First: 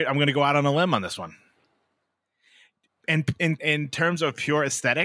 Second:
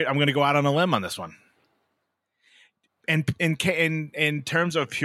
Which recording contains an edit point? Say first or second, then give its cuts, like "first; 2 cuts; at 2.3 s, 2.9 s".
first; 1 cut; at 3.6 s